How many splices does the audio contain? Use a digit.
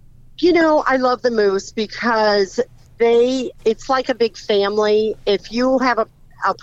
1